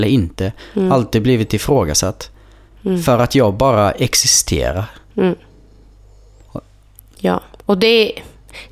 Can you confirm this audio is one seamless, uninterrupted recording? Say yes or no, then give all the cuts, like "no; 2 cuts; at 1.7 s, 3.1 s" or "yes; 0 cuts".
yes; 0 cuts